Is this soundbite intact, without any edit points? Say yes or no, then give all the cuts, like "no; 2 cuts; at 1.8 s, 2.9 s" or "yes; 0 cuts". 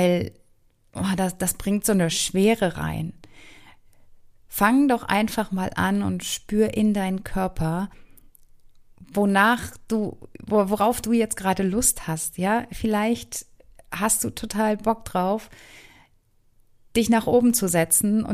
yes; 0 cuts